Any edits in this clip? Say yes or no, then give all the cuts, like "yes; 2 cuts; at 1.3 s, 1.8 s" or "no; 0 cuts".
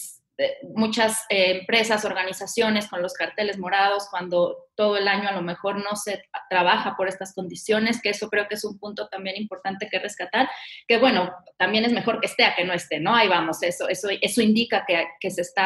no; 0 cuts